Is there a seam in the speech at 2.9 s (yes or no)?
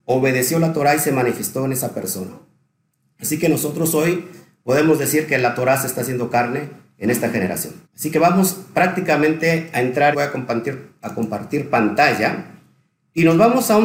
no